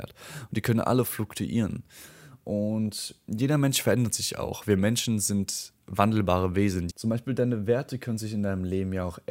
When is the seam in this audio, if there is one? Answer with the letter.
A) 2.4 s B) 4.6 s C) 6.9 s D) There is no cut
C